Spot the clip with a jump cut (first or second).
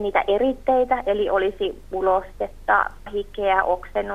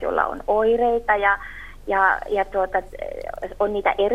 first